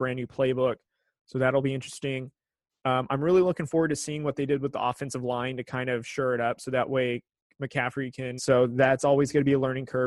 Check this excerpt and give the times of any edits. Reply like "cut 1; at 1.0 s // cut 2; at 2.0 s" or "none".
cut 1; at 8.4 s